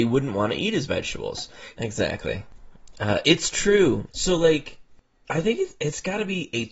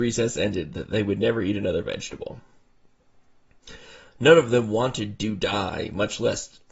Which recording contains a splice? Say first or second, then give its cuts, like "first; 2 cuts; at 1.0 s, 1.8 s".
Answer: first; 2 cuts; at 1.7 s, 4.1 s